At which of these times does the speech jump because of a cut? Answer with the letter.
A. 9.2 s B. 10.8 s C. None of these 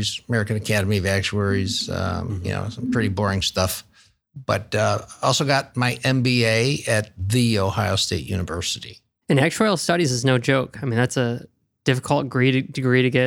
A